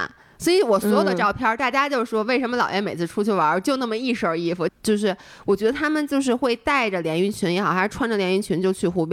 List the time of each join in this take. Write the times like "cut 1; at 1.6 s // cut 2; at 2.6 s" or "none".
cut 1; at 4.7 s